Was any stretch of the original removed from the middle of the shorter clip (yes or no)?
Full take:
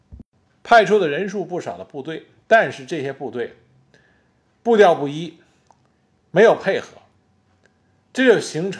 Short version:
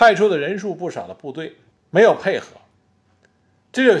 yes